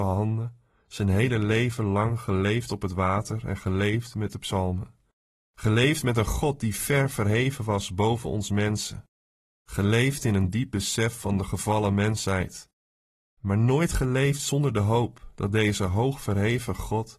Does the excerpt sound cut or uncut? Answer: uncut